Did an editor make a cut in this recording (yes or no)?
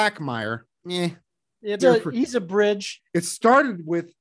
yes